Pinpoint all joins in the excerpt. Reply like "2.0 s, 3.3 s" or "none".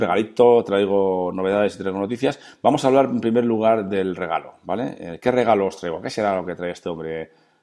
none